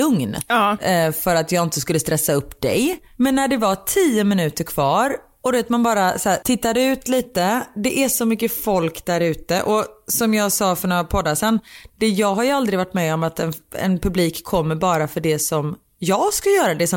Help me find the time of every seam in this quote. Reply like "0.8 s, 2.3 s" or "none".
3.1 s